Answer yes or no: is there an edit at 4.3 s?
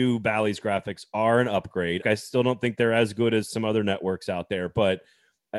no